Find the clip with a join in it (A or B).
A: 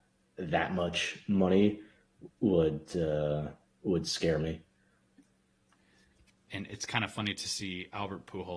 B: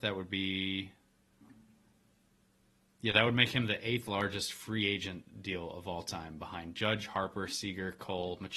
A